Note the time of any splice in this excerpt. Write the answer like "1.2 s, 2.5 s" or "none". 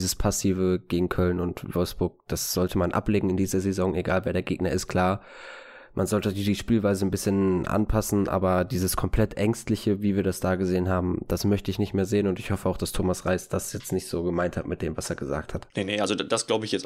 15.7 s